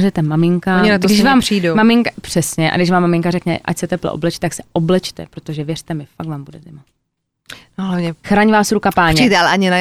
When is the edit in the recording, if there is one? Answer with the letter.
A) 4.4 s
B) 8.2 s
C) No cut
B